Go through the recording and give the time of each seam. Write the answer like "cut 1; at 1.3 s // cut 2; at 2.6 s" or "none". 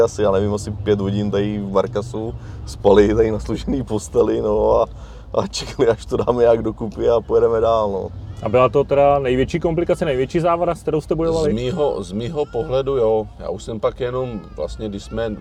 none